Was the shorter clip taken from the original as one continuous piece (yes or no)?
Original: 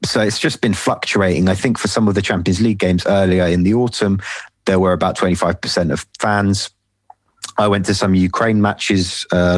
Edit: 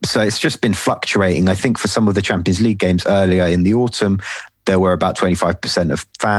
yes